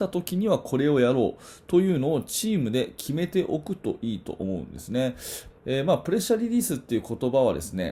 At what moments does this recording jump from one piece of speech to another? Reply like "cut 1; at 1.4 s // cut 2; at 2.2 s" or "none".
cut 1; at 5.5 s